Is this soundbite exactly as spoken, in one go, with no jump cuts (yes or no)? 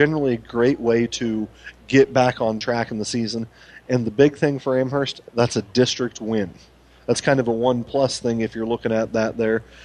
yes